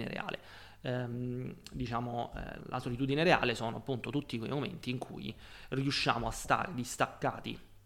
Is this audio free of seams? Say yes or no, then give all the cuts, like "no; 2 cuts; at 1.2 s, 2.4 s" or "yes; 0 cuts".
no; 1 cut; at 2.6 s